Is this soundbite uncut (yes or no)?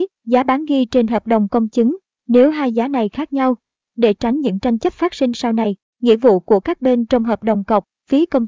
yes